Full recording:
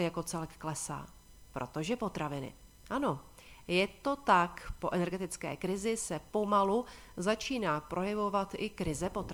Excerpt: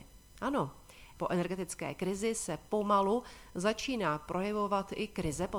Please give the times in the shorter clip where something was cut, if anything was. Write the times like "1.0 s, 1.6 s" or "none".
1.2 s